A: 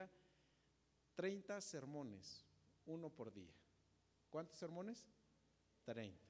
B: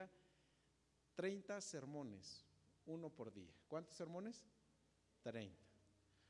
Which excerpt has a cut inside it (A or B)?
B